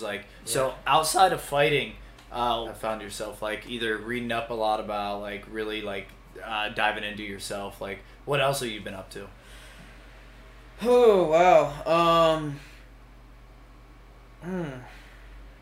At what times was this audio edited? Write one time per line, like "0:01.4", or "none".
0:02.6